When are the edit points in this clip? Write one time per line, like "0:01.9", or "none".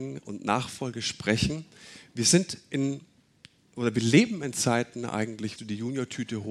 0:05.6